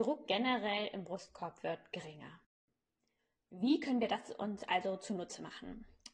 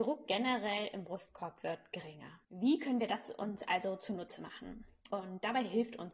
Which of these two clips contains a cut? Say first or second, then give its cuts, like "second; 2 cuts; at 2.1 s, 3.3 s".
second; 2 cuts; at 2.5 s, 5.1 s